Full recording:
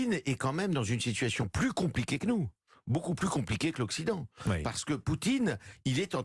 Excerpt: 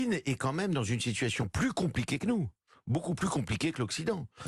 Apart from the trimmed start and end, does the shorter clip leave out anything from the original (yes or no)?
no